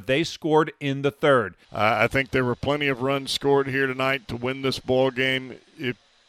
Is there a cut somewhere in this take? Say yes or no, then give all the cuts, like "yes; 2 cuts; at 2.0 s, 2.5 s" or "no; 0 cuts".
yes; 1 cut; at 1.6 s